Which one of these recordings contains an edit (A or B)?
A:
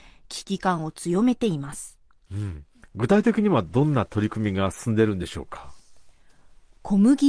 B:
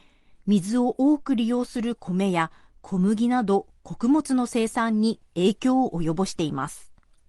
A